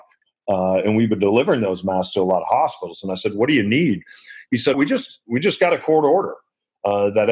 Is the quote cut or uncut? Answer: cut